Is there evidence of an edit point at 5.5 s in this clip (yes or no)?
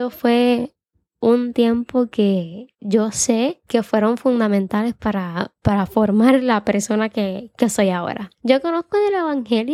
no